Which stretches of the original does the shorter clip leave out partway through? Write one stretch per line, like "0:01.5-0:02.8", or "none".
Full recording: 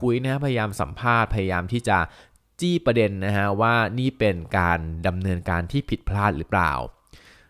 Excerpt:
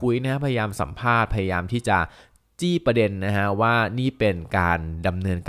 none